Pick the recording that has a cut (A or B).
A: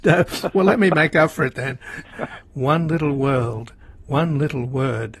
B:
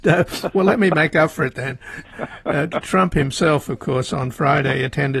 A